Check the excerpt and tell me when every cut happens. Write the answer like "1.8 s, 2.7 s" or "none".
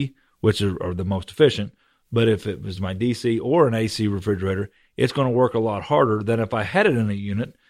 none